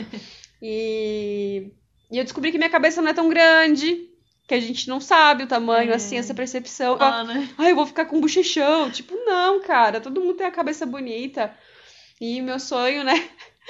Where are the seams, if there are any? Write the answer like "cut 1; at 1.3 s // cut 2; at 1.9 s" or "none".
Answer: cut 1; at 7.0 s